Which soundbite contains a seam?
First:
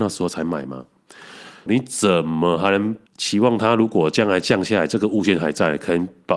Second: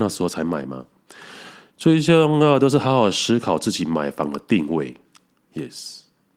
first; 2 cuts; at 1.7 s, 3.1 s

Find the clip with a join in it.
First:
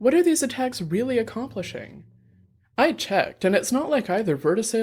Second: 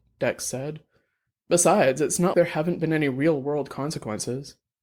second; 1 cut; at 2.3 s

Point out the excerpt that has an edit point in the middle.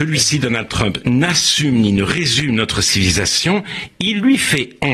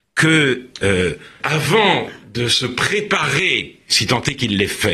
second; 1 cut; at 1.4 s

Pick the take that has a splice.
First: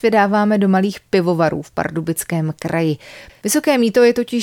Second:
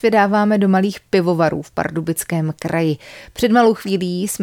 first; 1 cut; at 3.3 s

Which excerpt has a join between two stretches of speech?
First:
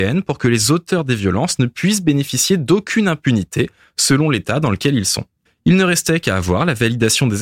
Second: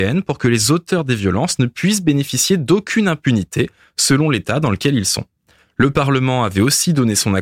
first; 1 cut; at 5.5 s

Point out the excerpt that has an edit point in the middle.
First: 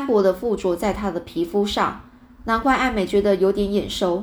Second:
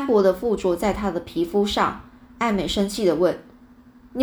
first; 1 cut; at 2.4 s

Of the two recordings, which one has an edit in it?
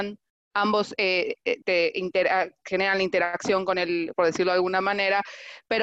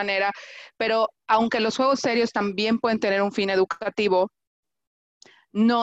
first; 2 cuts; at 1.6 s, 4.1 s

